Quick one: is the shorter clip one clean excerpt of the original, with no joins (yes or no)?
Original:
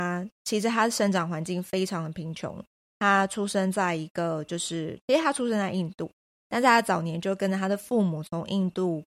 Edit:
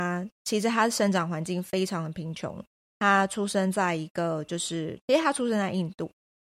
yes